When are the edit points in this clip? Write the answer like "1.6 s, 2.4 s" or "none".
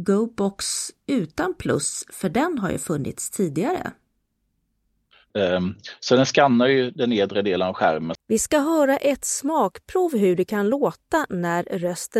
5.3 s, 8.2 s